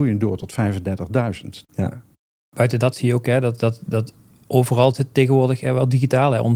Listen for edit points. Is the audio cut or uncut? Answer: cut